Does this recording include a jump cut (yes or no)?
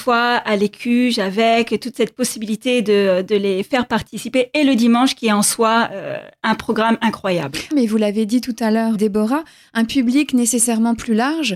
yes